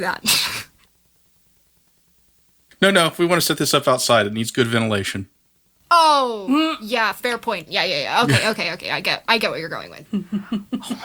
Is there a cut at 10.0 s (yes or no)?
yes